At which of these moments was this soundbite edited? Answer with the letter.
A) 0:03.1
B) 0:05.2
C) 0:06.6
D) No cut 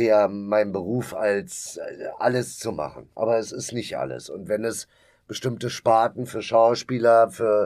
D